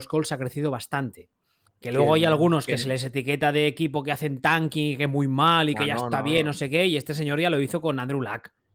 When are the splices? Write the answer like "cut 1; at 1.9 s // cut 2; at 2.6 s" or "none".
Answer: cut 1; at 1.6 s